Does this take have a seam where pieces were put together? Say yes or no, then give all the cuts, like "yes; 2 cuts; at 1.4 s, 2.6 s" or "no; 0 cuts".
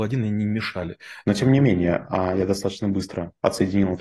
yes; 1 cut; at 1.2 s